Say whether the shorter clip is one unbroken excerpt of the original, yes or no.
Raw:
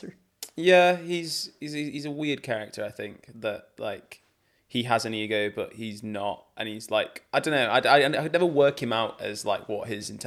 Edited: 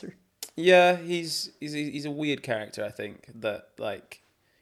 yes